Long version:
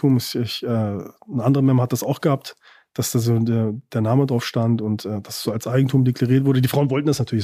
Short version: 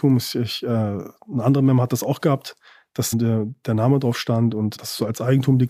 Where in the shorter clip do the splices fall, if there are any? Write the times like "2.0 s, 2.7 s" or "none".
3.1 s, 4.8 s